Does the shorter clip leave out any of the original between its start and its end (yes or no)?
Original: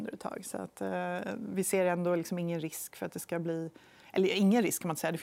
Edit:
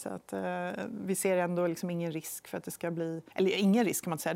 yes